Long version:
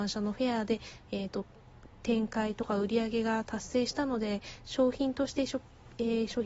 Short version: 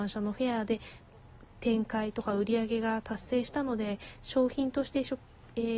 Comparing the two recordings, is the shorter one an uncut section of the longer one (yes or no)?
no